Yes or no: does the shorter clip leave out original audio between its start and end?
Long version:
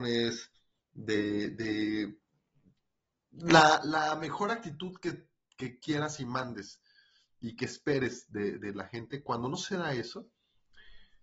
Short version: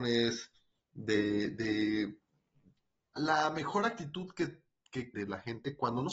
yes